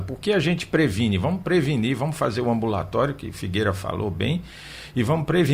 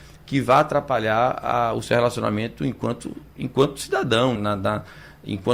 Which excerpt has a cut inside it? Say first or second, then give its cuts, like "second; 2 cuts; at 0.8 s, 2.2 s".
second; 2 cuts; at 3.3 s, 4.4 s